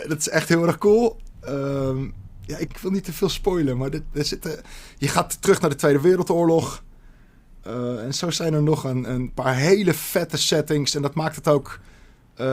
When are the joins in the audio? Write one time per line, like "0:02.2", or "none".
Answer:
0:02.7